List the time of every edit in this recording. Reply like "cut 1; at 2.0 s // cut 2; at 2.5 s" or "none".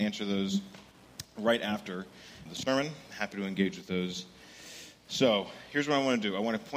cut 1; at 2.5 s